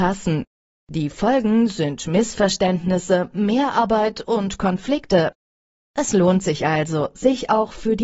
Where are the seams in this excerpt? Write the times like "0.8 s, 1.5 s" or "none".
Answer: none